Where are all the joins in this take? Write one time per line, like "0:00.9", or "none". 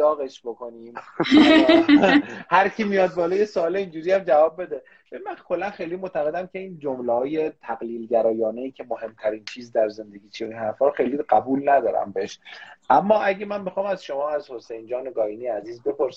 none